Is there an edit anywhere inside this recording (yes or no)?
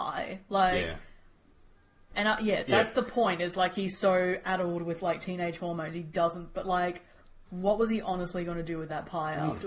no